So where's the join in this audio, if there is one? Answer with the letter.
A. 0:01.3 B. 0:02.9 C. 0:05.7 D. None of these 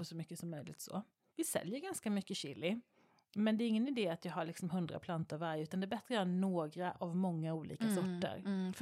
A